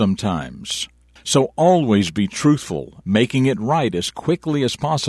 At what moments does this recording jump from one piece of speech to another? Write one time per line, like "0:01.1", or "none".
0:01.2
0:03.0